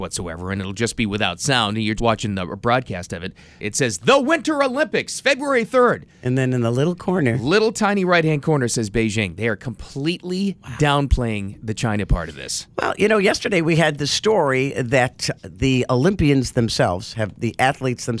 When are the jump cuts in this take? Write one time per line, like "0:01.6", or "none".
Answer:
0:02.0
0:03.6
0:15.4